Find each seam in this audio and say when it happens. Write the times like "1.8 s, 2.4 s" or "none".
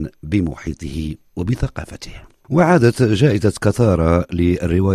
2.4 s